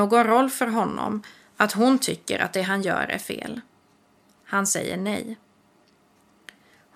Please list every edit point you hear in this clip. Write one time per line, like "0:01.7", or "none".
none